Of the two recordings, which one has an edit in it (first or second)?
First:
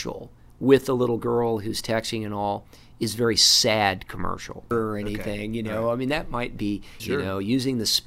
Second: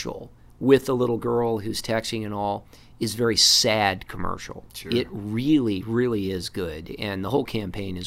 first